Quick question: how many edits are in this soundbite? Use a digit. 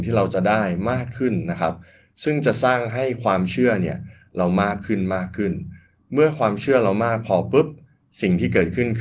0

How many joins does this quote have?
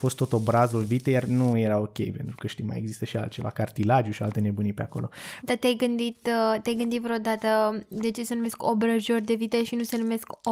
1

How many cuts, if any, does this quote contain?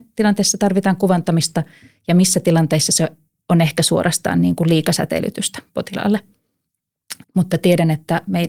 1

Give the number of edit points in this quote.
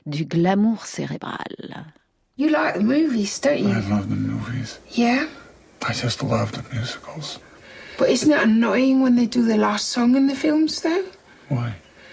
0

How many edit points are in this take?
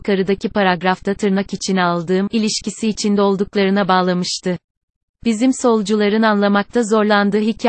1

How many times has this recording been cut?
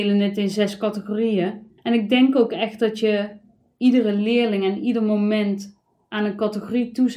1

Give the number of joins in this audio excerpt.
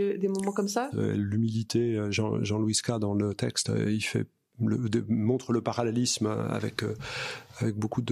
1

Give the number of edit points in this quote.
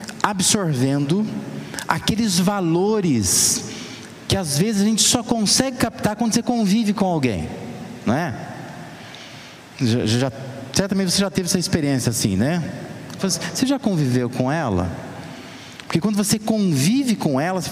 1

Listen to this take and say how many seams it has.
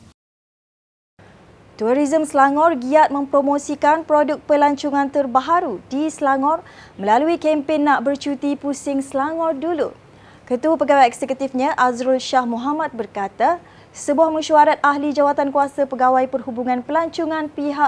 0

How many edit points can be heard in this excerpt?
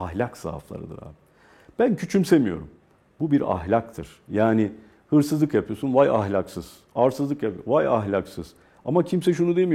0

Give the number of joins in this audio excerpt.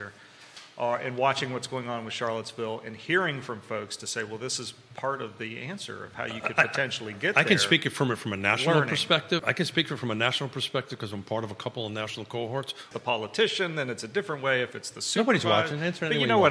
2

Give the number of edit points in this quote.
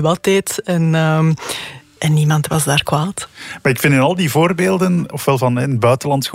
0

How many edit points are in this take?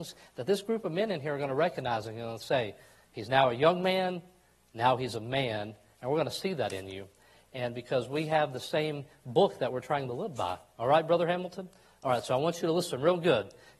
0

